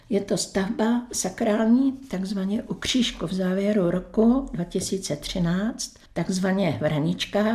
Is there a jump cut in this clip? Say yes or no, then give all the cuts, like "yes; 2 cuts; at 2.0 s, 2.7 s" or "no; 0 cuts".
yes; 1 cut; at 6.1 s